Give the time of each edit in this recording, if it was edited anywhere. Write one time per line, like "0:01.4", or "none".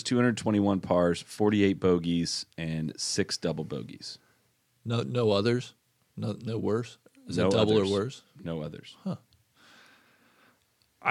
none

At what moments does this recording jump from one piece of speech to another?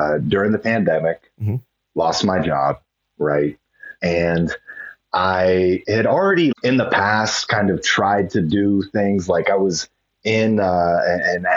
0:04.0
0:06.5

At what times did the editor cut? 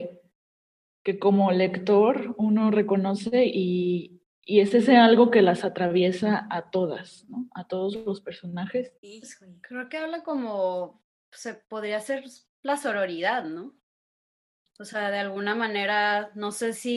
0:09.0

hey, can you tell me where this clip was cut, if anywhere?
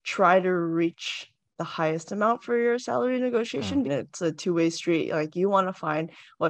0:03.8

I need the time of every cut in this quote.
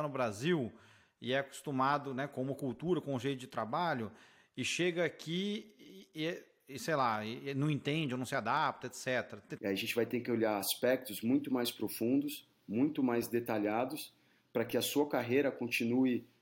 0:09.6

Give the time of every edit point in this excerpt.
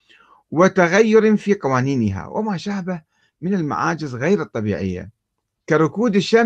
none

